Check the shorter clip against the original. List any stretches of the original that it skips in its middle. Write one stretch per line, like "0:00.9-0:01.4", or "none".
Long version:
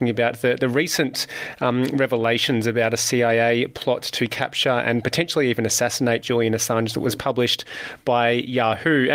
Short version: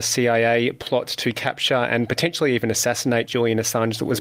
none